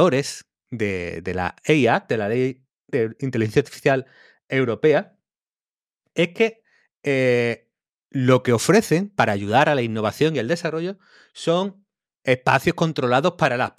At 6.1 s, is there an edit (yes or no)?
no